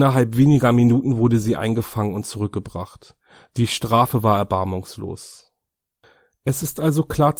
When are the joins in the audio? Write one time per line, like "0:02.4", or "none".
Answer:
none